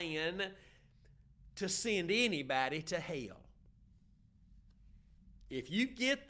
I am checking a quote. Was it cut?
no; 0 cuts

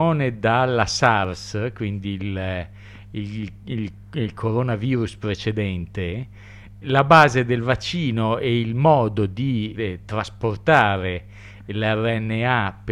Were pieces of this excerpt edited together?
yes; 2 cuts; at 6.8 s, 9.7 s

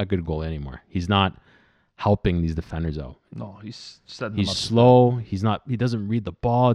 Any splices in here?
no; 0 cuts

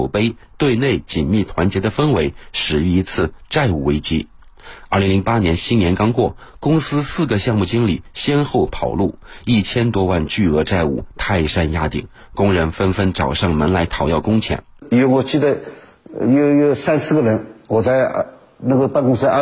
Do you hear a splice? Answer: no; 0 cuts

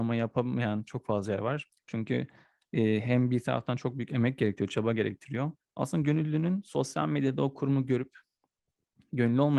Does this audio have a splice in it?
yes; 2 cuts; at 1.7 s, 5.6 s

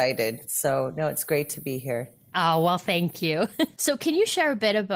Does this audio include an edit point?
yes; 1 cut; at 3.8 s

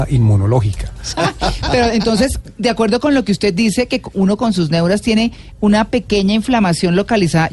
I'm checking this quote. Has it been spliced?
yes; 1 cut; at 1.1 s

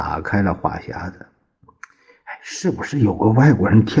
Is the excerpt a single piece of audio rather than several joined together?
yes; 0 cuts

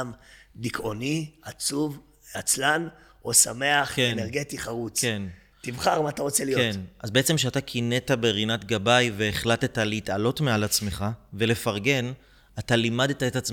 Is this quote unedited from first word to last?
yes; 0 cuts

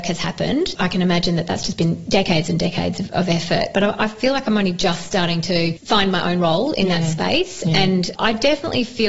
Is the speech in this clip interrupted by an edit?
no; 0 cuts

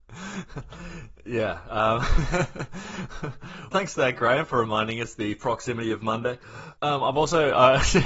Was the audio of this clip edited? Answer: yes; 2 cuts; at 3.7 s, 6.8 s

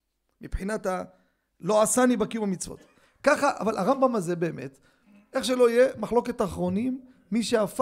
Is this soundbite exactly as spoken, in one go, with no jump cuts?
yes; 0 cuts

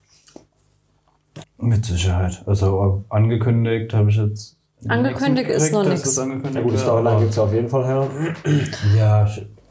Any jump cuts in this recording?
yes; 1 cut; at 1.4 s

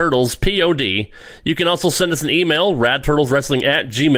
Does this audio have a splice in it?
no; 0 cuts

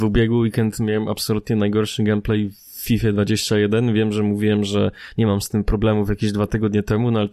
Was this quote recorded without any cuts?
yes; 0 cuts

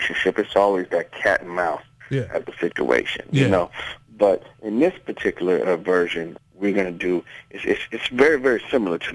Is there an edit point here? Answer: yes; 1 cut; at 6.4 s

